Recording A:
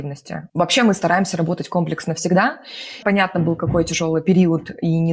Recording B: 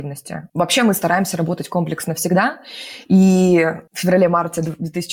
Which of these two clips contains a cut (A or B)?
A